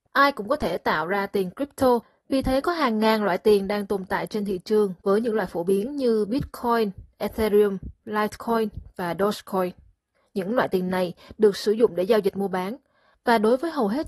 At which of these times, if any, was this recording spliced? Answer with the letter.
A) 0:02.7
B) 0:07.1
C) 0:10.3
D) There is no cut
D